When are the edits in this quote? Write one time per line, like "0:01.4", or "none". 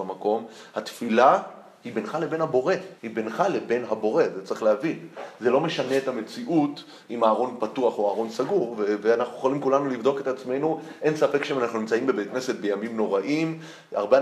0:03.0